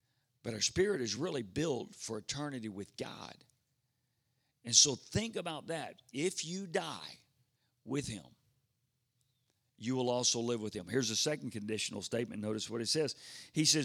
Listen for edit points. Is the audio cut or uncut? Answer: uncut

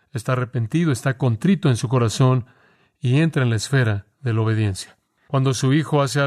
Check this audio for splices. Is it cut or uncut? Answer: cut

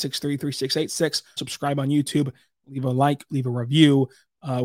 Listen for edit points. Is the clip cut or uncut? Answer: cut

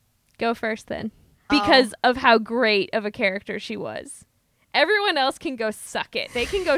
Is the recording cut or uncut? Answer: cut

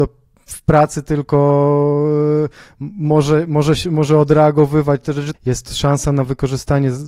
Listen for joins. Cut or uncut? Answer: cut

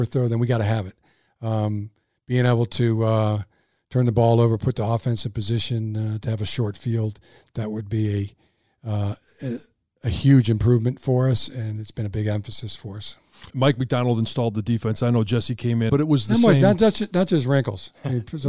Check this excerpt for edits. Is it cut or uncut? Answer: cut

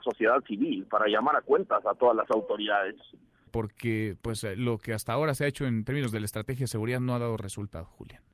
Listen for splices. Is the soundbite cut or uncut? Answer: cut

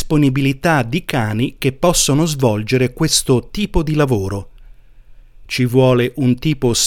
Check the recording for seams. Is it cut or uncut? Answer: uncut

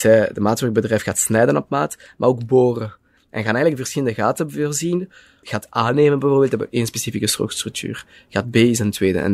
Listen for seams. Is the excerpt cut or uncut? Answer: cut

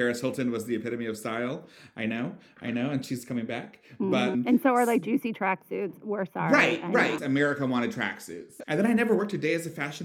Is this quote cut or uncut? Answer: cut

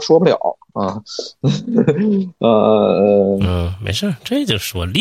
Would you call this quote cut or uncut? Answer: uncut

